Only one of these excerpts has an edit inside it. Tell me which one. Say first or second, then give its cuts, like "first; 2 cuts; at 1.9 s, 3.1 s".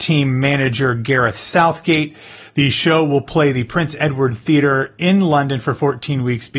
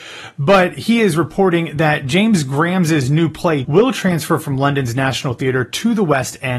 second; 1 cut; at 3.6 s